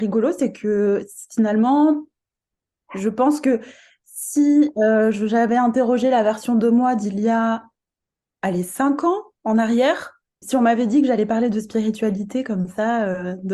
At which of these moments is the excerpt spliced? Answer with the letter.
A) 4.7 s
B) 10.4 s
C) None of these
B